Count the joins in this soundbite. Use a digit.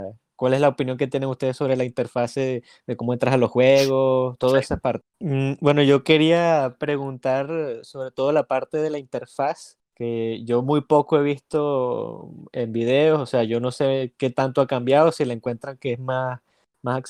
2